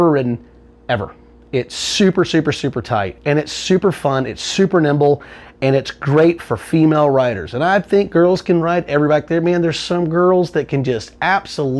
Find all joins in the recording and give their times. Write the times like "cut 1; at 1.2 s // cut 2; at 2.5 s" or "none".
none